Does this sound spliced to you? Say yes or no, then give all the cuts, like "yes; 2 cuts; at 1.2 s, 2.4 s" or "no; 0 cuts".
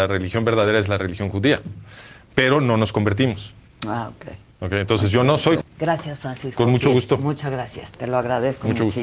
yes; 1 cut; at 5.6 s